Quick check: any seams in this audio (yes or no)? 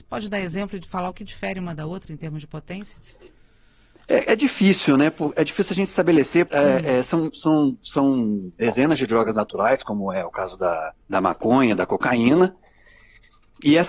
yes